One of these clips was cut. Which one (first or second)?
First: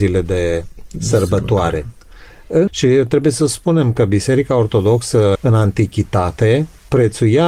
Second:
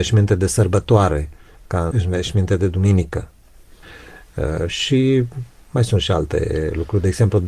first